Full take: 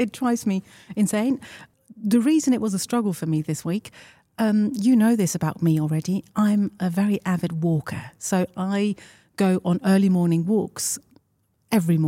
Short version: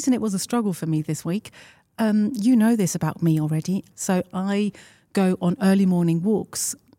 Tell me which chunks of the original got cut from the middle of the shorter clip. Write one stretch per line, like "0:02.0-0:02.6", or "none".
0:06.3-0:08.1